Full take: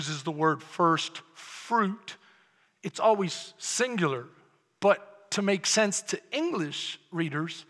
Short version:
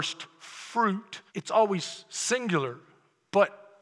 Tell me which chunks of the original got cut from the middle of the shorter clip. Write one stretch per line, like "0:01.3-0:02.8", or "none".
0:02.2-0:02.8